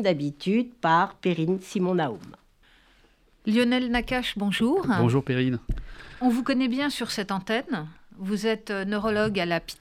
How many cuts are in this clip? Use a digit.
0